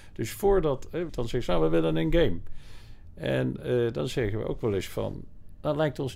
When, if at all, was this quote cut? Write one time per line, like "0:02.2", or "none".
0:01.1